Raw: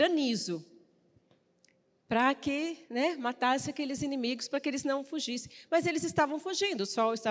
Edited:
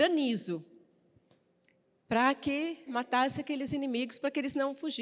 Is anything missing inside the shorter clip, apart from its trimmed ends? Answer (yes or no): yes